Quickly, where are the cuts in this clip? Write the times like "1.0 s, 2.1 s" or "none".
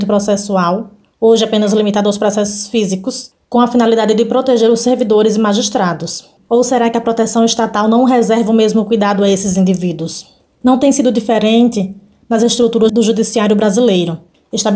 6.4 s, 10.5 s